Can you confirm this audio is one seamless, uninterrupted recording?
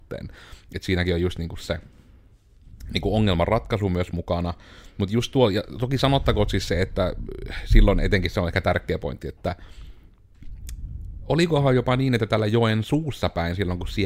yes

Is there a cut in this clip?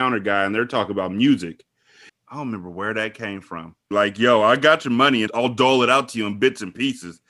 yes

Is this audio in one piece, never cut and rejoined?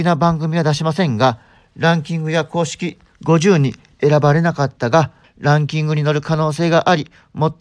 no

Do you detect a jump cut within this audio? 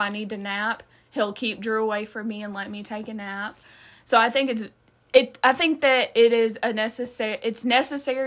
no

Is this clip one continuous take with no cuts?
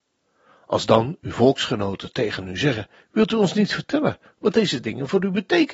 yes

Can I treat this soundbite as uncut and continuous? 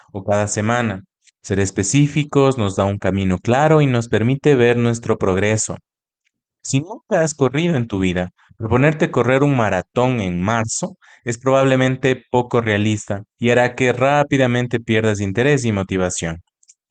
no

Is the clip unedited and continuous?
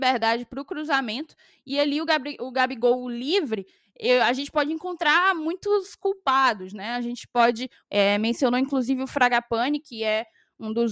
no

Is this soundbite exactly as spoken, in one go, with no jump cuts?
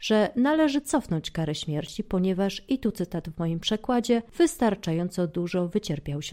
yes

